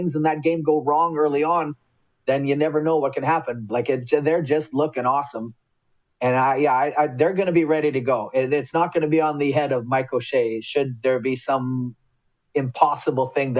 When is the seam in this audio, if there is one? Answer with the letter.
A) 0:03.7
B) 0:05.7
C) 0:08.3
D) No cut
A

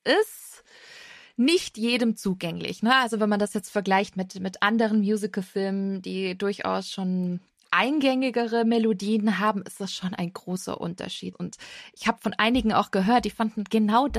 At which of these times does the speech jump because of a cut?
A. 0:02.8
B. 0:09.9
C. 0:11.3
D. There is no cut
C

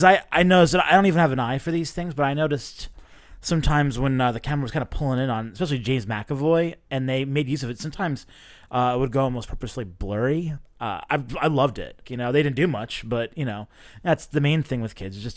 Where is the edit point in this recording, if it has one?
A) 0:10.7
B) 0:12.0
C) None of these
B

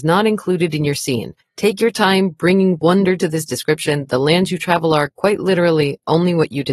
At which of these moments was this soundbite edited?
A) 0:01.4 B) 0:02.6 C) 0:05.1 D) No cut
A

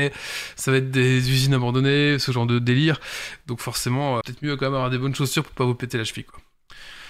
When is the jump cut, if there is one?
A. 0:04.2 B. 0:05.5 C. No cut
A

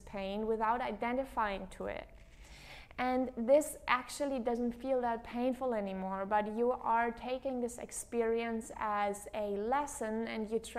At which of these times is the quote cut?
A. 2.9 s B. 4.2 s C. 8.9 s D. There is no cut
D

